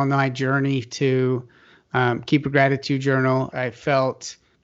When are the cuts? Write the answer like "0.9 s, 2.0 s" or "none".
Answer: 3.5 s